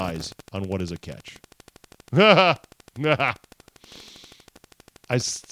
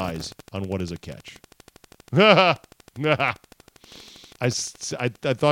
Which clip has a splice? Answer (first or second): second